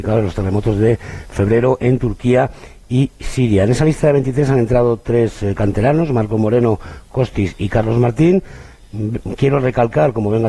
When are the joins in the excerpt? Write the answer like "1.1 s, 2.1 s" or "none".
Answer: none